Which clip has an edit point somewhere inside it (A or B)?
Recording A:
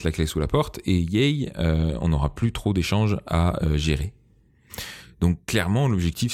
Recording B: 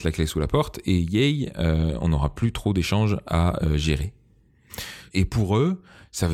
B